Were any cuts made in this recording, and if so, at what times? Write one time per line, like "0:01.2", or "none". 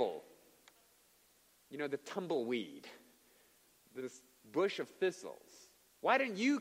0:04.0